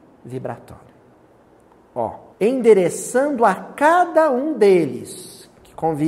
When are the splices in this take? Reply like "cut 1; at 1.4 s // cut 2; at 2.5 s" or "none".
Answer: cut 1; at 2.3 s